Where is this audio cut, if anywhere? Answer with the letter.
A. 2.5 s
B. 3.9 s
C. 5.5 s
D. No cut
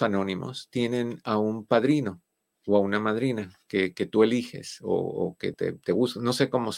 C